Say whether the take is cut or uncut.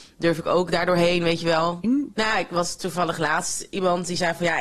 cut